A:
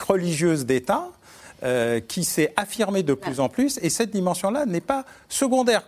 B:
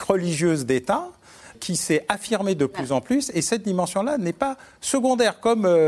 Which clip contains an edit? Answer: B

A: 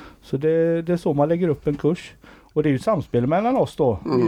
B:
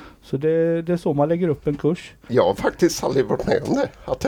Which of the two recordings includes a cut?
B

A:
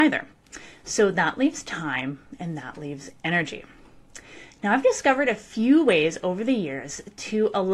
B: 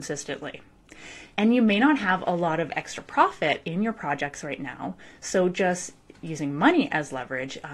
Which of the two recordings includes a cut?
B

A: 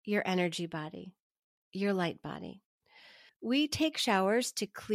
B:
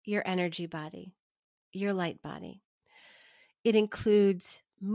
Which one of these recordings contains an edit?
A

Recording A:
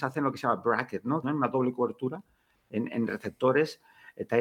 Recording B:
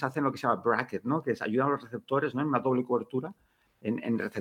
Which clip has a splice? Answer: A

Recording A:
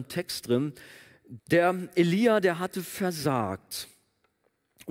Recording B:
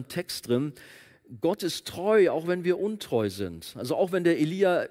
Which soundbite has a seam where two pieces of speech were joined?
A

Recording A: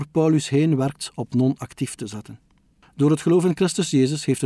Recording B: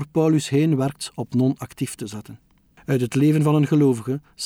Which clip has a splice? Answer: B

